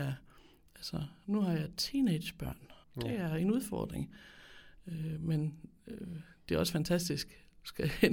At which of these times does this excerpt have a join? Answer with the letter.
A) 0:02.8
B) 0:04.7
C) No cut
A